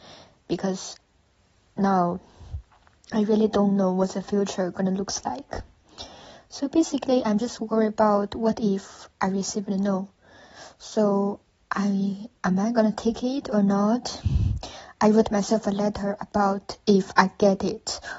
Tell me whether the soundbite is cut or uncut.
uncut